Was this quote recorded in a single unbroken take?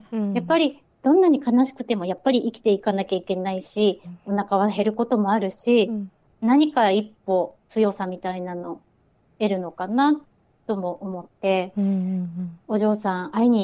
no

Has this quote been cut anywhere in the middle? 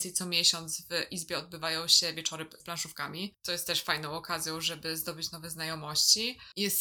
no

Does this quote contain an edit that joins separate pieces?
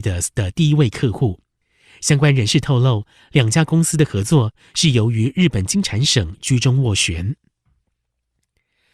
no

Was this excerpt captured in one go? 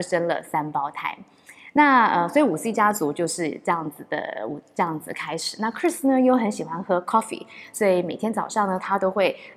yes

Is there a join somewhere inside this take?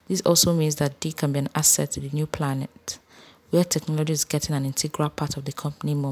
no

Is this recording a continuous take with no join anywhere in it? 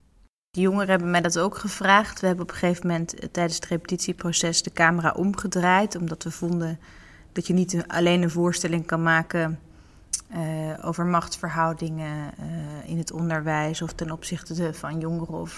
yes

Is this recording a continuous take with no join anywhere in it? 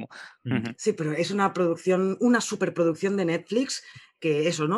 yes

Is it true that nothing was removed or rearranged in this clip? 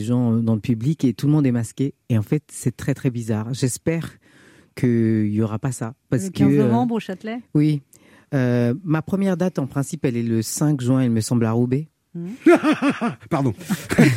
yes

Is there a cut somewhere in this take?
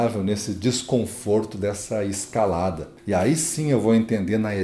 yes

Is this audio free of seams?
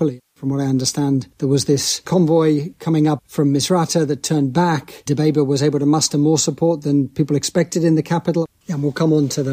no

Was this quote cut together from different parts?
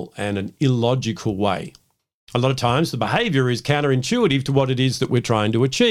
no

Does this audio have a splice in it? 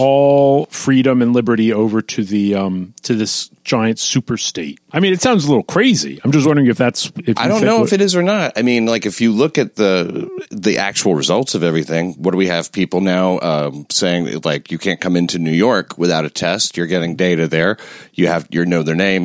no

